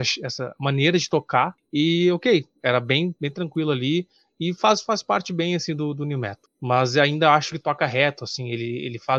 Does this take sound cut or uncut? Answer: uncut